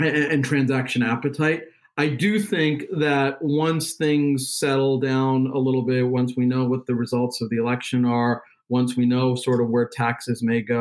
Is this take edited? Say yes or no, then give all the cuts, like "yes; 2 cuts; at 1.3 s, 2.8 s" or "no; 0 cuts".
no; 0 cuts